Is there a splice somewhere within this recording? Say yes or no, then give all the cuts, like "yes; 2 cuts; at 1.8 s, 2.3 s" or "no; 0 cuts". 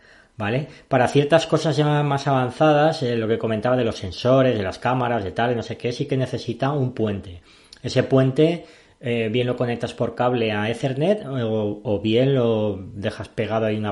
no; 0 cuts